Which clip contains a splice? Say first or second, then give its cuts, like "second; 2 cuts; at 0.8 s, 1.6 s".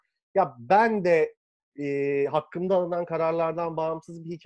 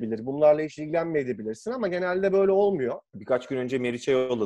second; 1 cut; at 3.1 s